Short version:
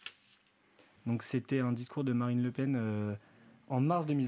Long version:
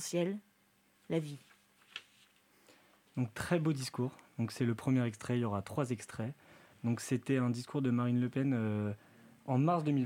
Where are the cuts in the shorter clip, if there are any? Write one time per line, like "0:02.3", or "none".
0:01.0